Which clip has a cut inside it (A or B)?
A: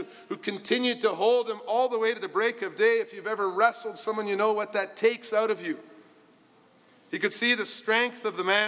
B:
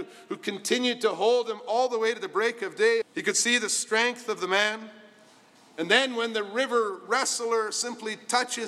B